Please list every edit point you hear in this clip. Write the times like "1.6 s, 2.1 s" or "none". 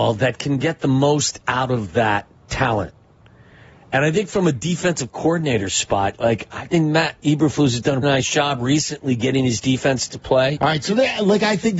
2.4 s, 8.0 s, 10.6 s